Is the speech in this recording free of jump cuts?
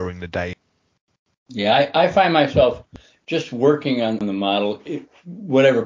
yes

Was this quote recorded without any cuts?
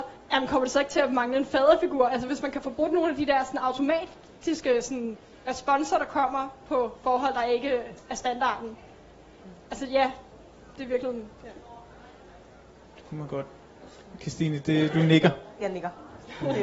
yes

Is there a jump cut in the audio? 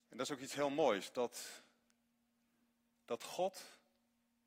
no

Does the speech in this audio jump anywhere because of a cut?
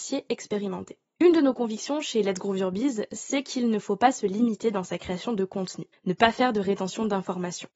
yes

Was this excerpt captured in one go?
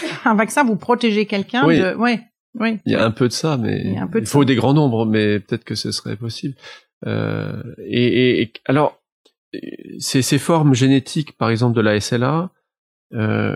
yes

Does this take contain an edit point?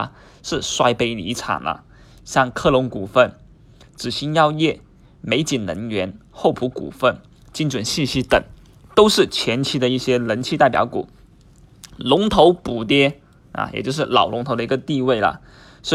no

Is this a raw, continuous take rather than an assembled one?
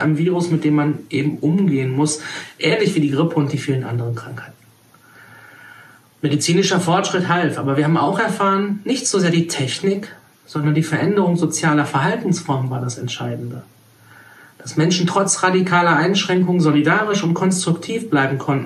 yes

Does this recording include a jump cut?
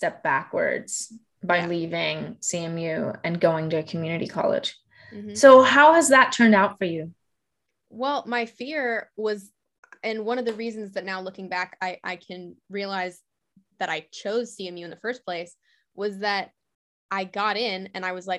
no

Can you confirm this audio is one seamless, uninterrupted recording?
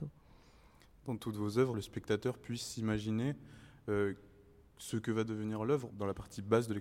no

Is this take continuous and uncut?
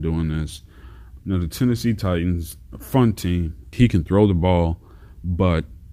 no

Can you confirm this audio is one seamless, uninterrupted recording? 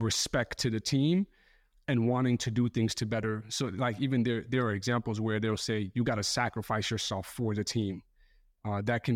yes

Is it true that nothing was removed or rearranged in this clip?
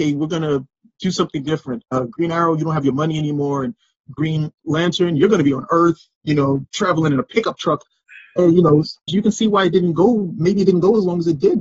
no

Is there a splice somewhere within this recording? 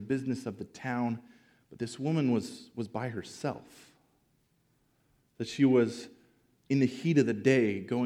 no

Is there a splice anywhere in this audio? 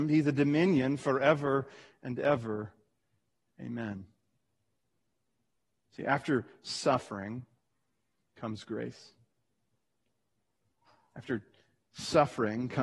no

